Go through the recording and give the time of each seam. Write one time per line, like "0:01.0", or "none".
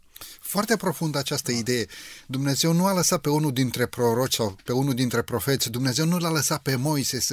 none